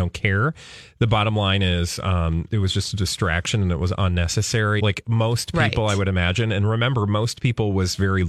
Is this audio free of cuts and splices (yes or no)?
no